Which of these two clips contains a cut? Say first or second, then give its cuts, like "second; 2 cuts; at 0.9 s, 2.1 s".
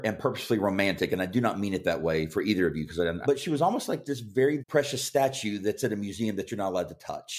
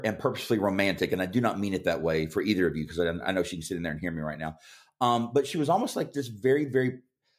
first; 2 cuts; at 3.2 s, 4.6 s